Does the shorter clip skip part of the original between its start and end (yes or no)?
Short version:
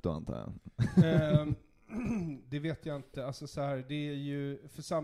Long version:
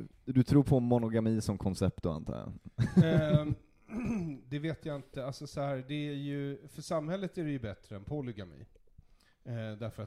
no